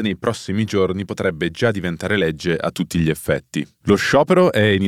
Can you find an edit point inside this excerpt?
yes; 1 cut; at 3.8 s

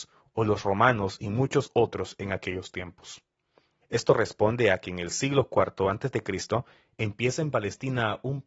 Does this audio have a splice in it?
yes; 1 cut; at 3.8 s

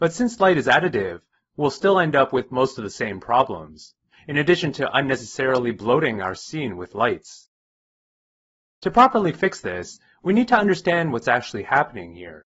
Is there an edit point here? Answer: no; 0 cuts

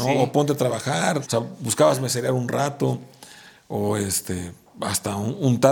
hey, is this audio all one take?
no; 1 cut; at 1.2 s

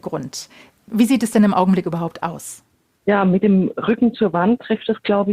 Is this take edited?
no; 0 cuts

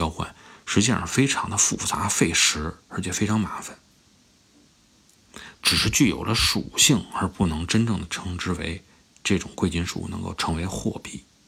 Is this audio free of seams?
no; 1 cut; at 5.6 s

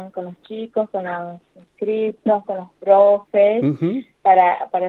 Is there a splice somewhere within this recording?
no; 0 cuts

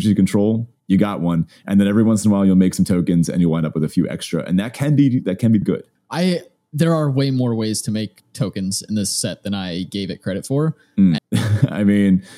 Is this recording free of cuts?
no; 2 cuts; at 5.6 s, 11.2 s

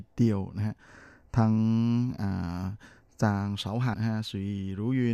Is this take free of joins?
no; 1 cut; at 3.9 s

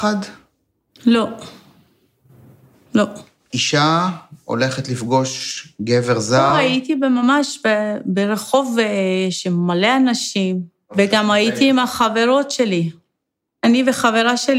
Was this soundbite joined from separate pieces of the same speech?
no; 0 cuts

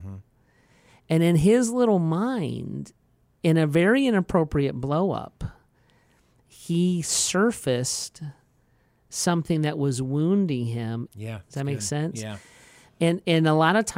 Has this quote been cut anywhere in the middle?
yes; 1 cut; at 11.1 s

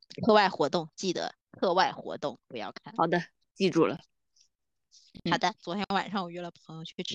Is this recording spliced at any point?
no; 0 cuts

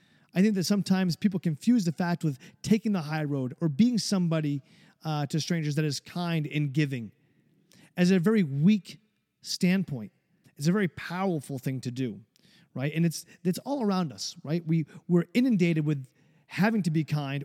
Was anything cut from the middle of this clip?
yes; 1 cut; at 10.4 s

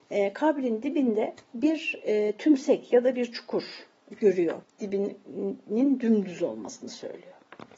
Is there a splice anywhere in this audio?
yes; 2 cuts; at 1.4 s, 4.6 s

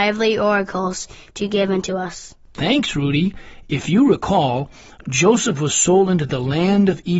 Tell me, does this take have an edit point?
no; 0 cuts

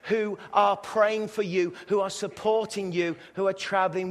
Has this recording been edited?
no; 0 cuts

